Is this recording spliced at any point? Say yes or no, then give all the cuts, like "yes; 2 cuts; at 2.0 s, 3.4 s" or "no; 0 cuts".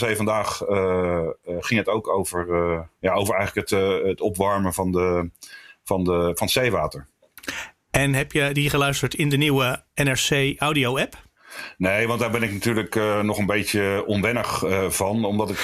no; 0 cuts